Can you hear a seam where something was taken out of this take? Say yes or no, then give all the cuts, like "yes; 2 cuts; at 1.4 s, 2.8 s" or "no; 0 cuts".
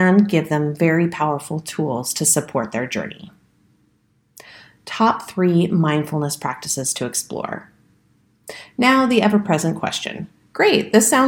no; 0 cuts